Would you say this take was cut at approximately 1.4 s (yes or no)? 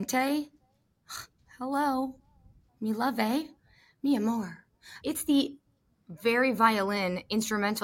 no